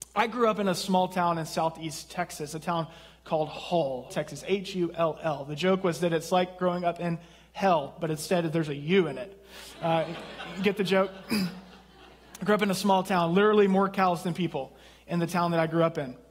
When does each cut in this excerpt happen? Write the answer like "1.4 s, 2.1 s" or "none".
4.1 s